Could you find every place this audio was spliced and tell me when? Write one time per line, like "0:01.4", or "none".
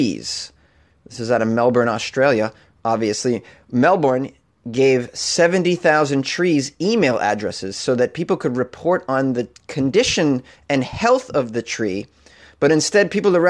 none